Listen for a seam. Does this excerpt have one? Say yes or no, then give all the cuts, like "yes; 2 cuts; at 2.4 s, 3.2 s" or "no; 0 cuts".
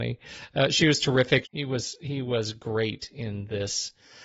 yes; 1 cut; at 1.4 s